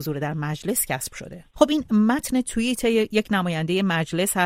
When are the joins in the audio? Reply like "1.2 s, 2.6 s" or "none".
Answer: 1.5 s